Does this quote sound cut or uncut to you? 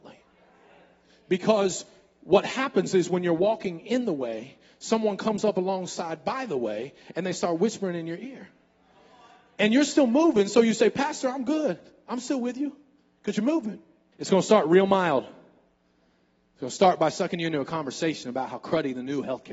cut